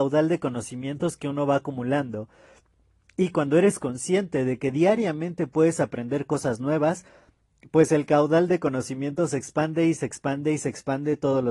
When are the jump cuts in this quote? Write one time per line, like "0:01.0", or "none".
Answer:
none